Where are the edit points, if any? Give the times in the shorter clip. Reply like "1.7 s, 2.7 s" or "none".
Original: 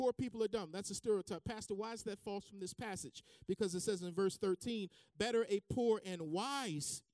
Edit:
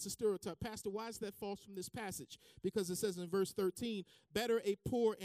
none